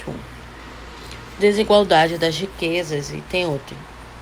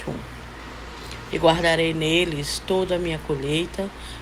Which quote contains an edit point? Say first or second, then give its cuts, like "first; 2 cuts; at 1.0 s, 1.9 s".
second; 1 cut; at 1.3 s